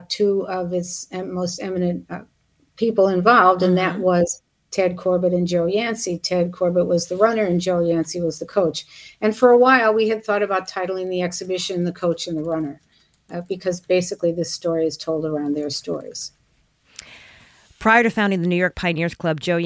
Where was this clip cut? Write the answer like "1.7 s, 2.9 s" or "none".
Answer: none